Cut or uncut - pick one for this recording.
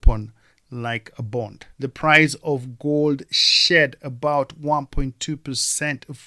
cut